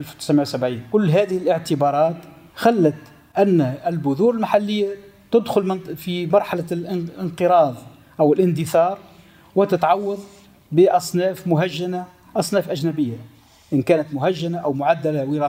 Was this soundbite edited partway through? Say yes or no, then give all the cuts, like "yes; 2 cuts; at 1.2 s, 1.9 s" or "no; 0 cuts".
no; 0 cuts